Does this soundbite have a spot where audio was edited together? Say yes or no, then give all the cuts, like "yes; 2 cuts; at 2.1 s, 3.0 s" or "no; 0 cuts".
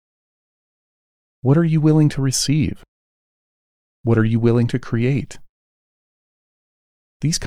no; 0 cuts